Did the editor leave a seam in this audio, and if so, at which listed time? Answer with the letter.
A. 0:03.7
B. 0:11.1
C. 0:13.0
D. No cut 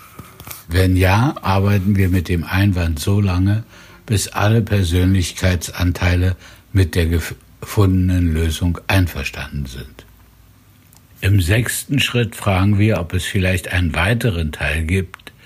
B